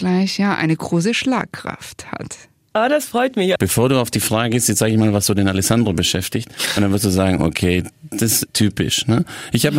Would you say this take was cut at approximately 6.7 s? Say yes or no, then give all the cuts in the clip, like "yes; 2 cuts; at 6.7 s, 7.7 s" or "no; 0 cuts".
no; 2 cuts; at 3.6 s, 8.5 s